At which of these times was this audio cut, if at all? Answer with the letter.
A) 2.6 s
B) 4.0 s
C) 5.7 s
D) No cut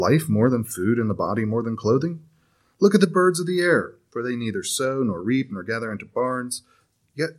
D